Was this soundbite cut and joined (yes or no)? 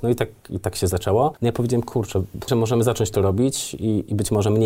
yes